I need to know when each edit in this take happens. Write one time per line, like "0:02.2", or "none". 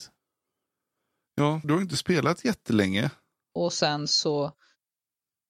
0:01.6
0:03.5